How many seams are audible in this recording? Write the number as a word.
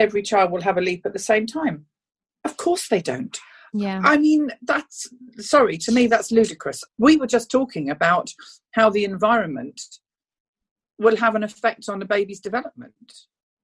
one